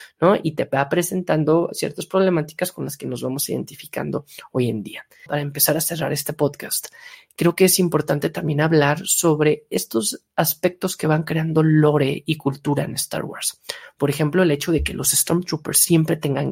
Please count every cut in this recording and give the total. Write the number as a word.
one